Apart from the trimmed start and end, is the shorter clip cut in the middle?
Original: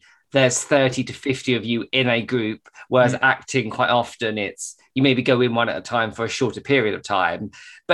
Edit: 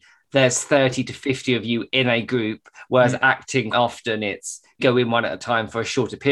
yes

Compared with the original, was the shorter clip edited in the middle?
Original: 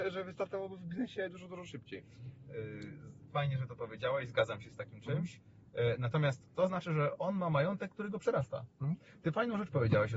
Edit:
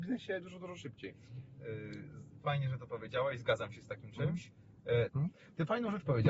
yes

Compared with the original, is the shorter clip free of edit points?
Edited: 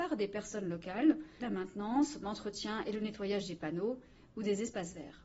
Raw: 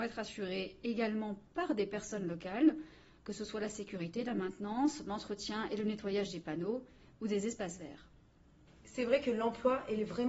no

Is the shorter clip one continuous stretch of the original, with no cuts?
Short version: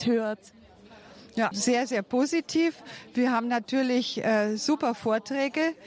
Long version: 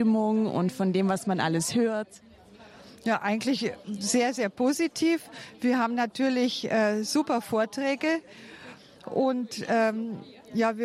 no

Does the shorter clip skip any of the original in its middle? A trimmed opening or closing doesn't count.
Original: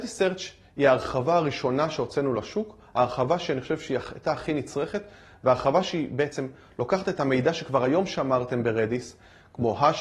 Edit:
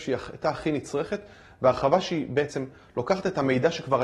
no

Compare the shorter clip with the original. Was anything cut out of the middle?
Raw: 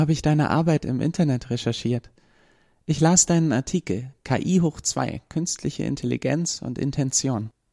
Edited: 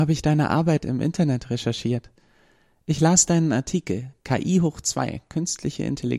no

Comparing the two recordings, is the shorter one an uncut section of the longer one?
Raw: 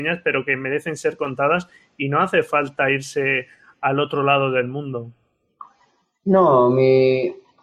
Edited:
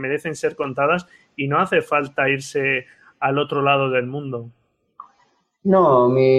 yes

